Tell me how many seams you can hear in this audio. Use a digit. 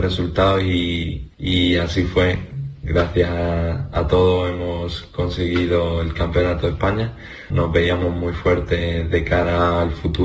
3